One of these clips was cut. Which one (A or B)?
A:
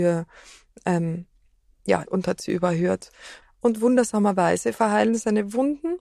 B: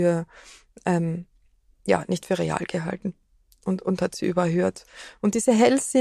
A